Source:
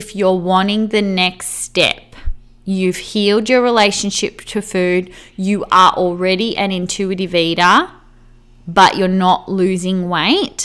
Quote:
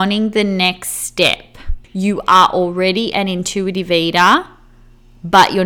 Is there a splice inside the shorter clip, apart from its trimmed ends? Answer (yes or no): yes